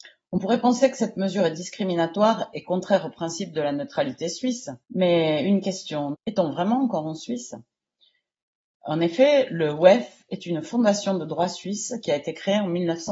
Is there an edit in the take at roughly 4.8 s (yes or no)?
yes